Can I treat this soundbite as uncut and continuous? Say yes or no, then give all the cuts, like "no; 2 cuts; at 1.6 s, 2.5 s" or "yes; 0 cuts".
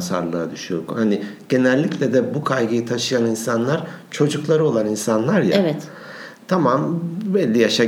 yes; 0 cuts